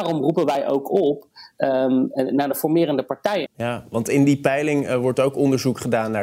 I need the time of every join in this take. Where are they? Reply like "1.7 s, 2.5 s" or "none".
3.5 s